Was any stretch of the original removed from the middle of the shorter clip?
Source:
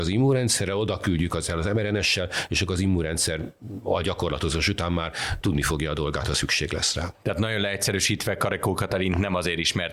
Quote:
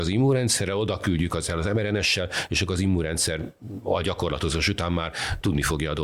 no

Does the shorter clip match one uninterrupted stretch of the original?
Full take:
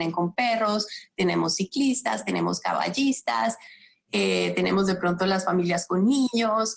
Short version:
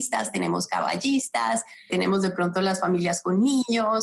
no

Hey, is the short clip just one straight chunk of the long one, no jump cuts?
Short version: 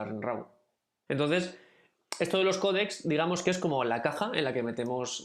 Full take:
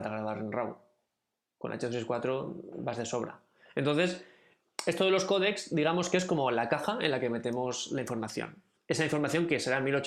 no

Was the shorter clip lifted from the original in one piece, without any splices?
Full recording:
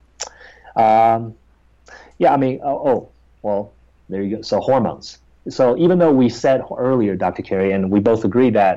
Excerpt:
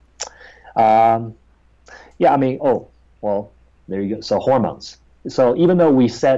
no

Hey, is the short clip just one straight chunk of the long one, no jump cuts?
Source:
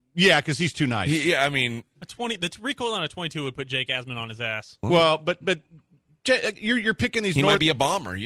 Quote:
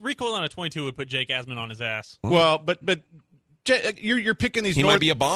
yes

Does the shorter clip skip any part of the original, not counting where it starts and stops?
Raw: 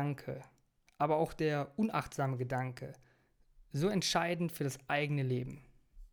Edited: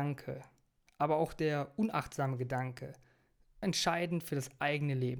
yes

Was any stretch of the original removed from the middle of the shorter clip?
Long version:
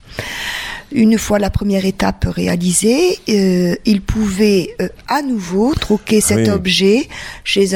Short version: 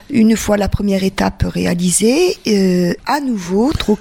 yes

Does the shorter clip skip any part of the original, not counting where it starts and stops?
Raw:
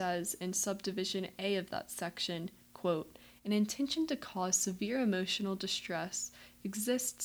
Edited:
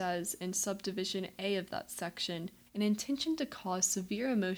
yes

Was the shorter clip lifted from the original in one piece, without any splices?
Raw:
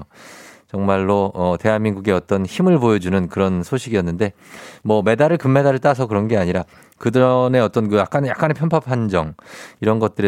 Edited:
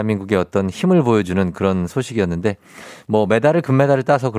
yes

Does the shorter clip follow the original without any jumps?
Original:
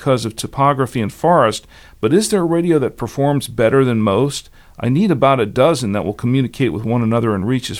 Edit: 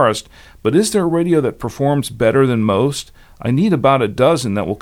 yes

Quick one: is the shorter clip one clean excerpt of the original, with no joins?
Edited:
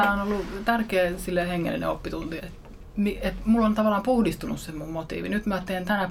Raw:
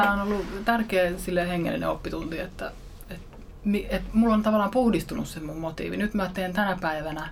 no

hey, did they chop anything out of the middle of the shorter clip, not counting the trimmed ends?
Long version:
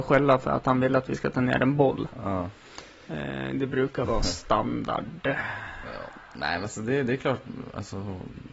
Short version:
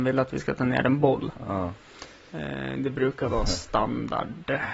no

